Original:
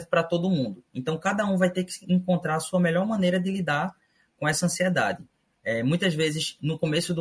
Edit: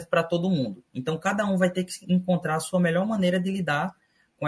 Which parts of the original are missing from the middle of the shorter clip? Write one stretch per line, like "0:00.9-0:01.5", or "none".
none